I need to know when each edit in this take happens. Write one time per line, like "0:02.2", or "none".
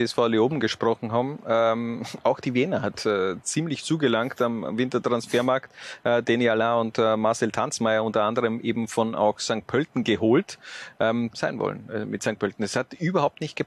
0:11.3